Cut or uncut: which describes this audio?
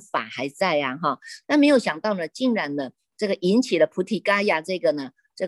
cut